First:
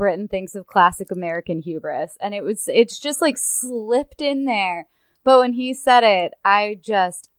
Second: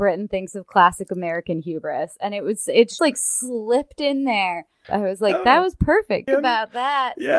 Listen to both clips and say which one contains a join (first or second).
second